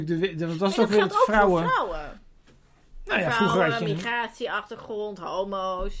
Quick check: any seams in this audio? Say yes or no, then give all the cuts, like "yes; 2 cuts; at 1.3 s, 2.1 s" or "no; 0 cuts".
no; 0 cuts